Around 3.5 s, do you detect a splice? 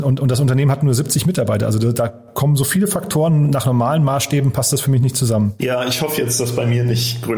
no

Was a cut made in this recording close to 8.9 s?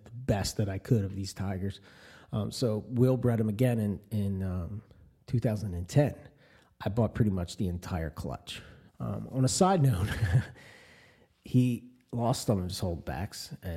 yes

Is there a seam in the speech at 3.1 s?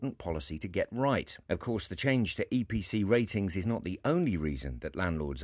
no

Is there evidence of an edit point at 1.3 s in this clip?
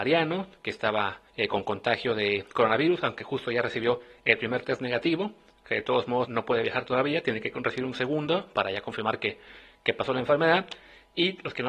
yes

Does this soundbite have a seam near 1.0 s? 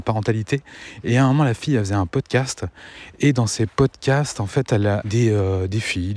no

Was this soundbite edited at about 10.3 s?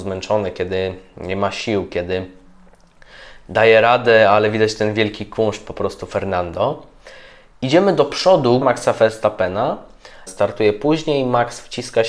yes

